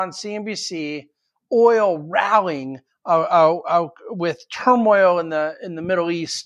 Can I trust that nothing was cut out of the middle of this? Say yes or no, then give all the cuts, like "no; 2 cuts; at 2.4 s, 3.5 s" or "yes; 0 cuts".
yes; 0 cuts